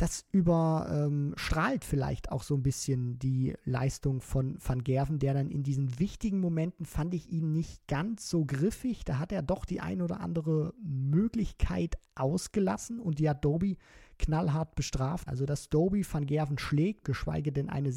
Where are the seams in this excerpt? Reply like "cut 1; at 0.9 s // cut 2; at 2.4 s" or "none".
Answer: cut 1; at 15.3 s // cut 2; at 17.0 s

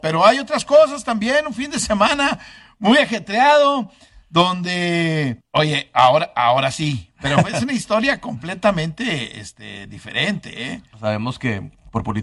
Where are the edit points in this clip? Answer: cut 1; at 5.4 s // cut 2; at 10.9 s

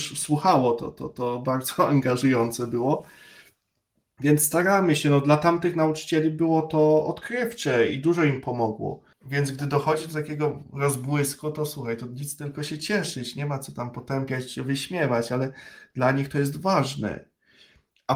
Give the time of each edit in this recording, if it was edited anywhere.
cut 1; at 9.1 s

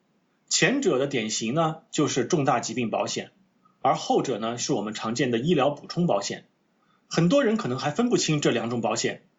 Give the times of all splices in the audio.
none

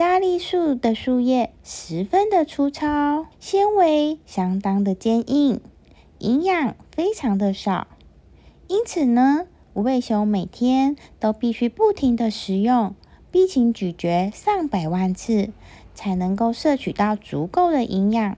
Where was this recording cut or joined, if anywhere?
cut 1; at 3.3 s

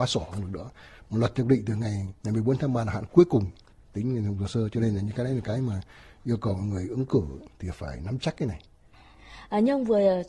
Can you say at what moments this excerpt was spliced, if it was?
cut 1; at 2.2 s

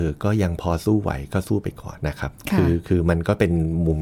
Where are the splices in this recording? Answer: cut 1; at 2.0 s

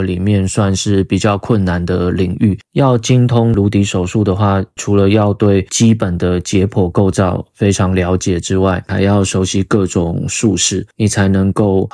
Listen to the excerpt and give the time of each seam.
none

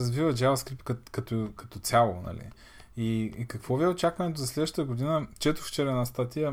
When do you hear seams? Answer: none

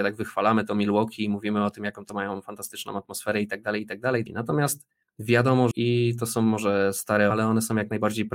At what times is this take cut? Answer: cut 1; at 4.3 s // cut 2; at 5.7 s // cut 3; at 7.3 s

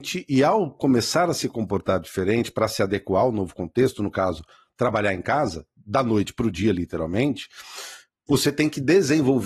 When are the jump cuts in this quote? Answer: none

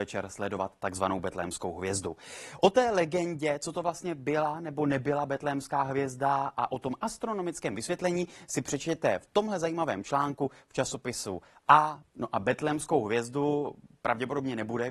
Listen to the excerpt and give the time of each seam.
cut 1; at 12.0 s

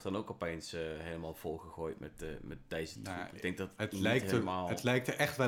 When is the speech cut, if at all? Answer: none

